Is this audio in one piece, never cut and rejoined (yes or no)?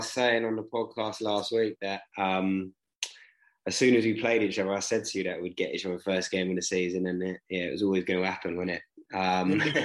yes